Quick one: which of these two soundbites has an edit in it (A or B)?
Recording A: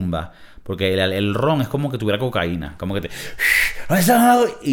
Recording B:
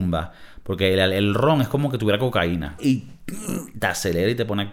B